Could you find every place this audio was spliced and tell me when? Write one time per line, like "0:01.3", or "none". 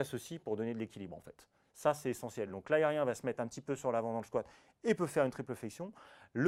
none

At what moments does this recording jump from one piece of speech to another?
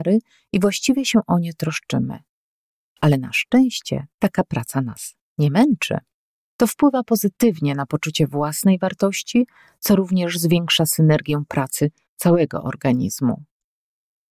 0:02.8
0:06.5

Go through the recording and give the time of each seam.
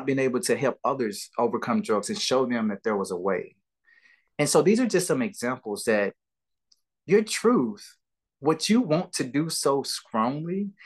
none

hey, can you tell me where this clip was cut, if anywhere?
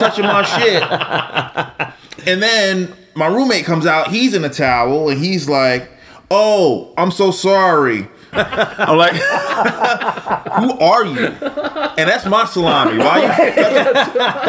0:08.3

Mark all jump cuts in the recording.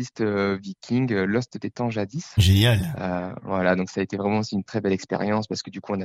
0:04.7

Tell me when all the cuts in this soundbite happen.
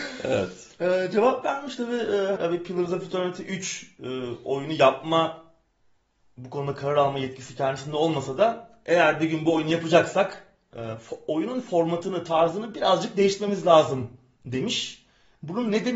0:02.4

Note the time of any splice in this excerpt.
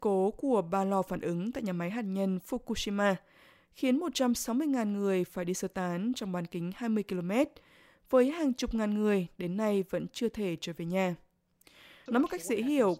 0:12.1

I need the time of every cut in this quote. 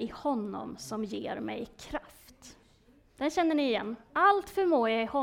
0:04.0

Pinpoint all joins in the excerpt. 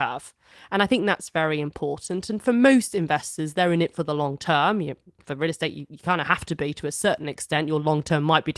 none

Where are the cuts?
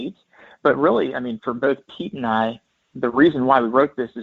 0:01.4

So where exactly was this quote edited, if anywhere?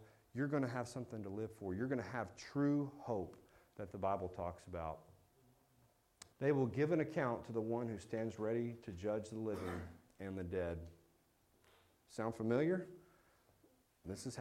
0:06.3

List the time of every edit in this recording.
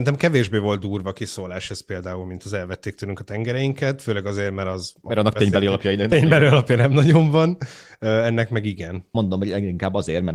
0:09.1

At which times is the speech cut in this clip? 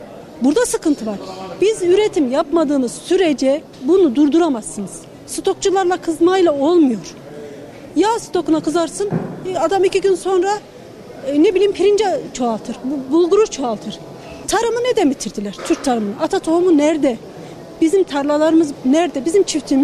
0:14.4

